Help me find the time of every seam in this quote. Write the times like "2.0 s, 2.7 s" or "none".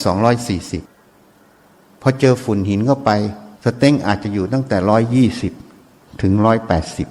3.5 s